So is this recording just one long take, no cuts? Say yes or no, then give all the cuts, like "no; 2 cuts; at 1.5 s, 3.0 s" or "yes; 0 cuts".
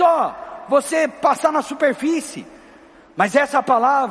yes; 0 cuts